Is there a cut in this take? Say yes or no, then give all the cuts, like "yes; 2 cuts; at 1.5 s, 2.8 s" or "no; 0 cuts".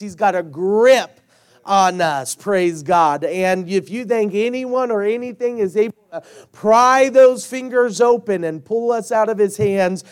no; 0 cuts